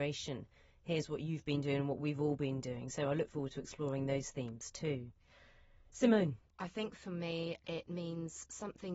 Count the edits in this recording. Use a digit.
1